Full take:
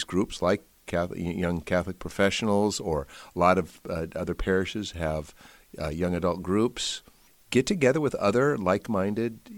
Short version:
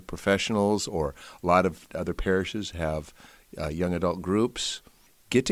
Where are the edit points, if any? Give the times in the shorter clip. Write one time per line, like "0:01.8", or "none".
0:01.9

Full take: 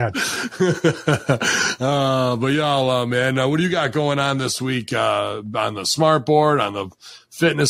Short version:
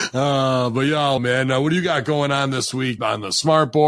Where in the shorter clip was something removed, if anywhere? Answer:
0:01.2
0:03.0

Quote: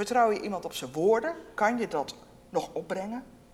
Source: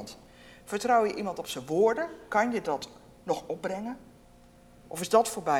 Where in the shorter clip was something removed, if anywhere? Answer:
none

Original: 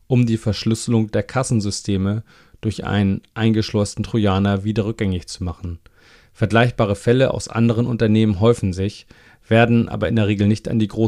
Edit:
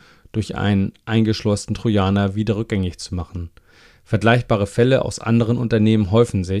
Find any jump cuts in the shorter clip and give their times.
none

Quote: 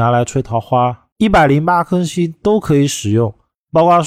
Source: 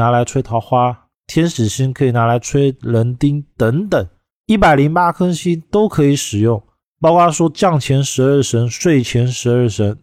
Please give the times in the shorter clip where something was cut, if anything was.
0:01.1

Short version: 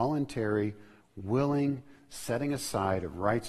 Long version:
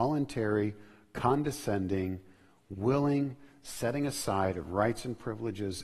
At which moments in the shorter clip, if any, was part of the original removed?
0:01.0

